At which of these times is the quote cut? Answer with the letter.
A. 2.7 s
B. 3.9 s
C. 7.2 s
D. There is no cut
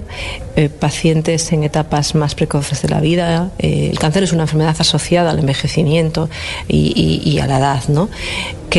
B